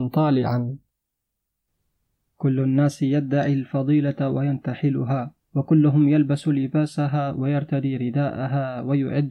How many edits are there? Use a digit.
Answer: 1